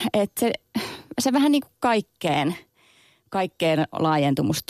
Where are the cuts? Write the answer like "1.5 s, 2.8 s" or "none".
none